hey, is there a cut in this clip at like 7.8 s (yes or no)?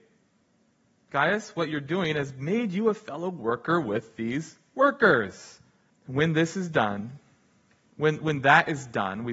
no